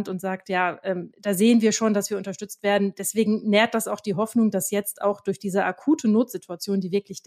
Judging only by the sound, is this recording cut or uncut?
uncut